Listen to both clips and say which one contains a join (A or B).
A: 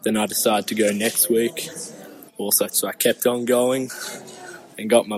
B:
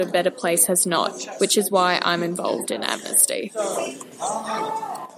A